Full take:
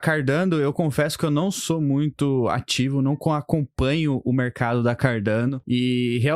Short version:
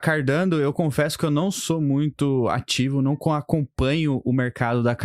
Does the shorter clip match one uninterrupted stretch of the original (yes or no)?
yes